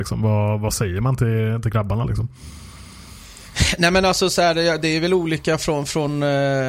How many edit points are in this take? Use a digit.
0